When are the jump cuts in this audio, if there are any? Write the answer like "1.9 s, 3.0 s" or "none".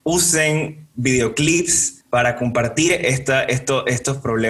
2.0 s